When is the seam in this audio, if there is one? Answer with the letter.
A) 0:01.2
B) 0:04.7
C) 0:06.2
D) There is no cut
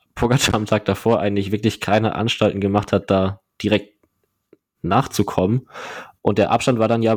D